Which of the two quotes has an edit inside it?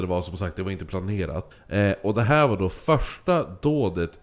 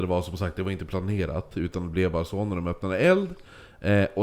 first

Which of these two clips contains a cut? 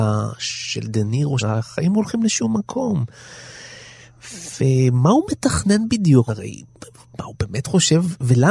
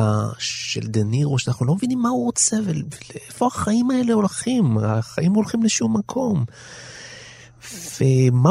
first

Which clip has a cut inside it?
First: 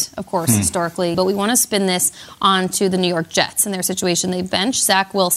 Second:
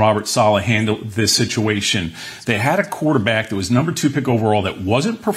first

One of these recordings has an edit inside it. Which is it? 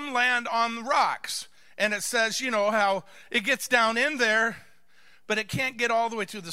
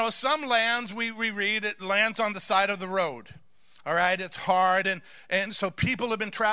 second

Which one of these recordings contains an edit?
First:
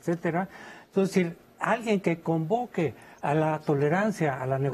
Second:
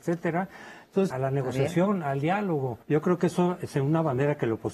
second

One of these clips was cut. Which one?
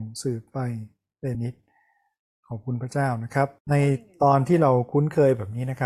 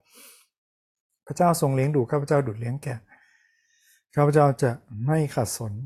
first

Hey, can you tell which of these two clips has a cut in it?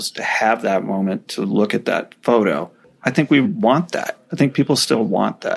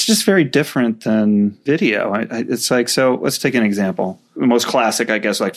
first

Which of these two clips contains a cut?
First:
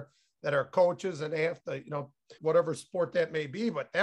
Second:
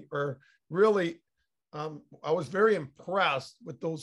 first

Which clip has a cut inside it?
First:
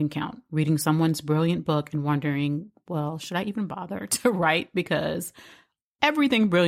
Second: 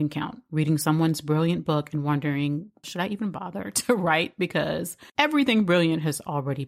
second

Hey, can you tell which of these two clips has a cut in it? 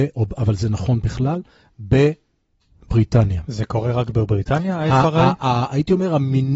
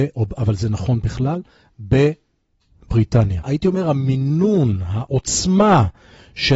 second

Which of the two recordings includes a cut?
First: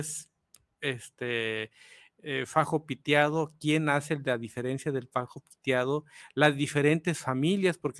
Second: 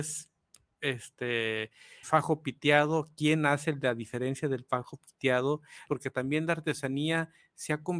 second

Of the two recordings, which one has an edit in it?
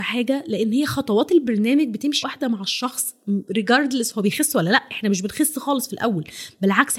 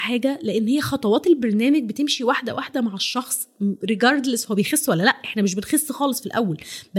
first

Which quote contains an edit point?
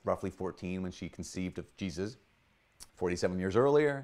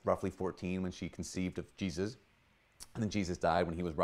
first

